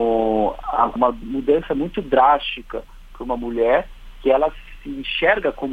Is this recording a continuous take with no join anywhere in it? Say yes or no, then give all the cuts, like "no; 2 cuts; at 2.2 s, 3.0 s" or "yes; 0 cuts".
no; 1 cut; at 1.0 s